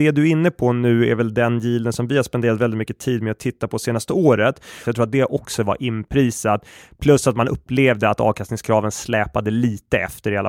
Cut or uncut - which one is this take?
cut